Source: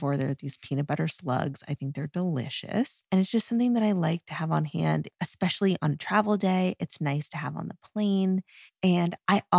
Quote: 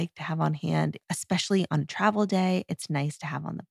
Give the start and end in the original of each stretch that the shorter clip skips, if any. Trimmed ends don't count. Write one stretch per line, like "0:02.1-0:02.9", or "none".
none